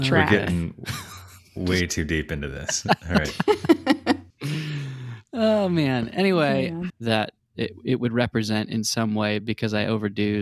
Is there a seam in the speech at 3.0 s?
no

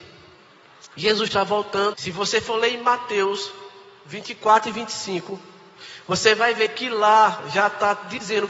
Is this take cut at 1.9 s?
yes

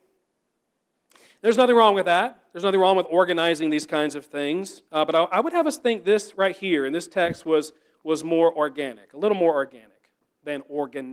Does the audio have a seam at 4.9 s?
yes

